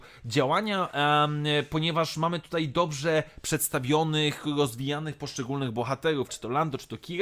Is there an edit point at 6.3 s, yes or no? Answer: yes